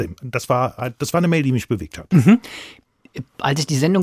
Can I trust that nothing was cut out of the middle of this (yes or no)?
yes